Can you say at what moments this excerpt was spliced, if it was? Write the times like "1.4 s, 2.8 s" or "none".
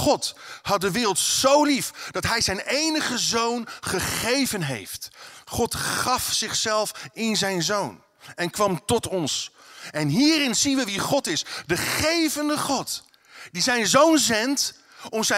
none